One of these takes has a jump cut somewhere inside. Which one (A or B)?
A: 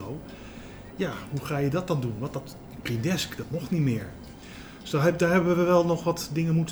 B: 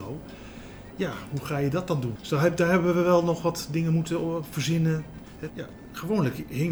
B